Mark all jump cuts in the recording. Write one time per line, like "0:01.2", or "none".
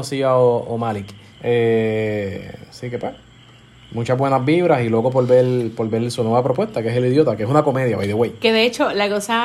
0:01.3